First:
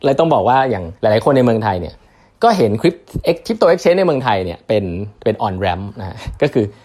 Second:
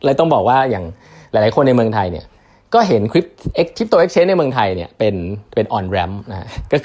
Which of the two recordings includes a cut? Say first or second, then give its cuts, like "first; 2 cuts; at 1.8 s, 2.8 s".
first; 1 cut; at 1.0 s